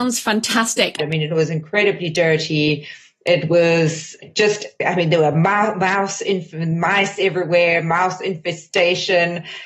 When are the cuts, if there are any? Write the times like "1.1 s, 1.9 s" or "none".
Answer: 1.0 s